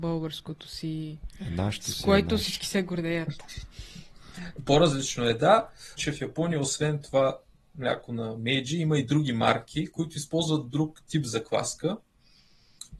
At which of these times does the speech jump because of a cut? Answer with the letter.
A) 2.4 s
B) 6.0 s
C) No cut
B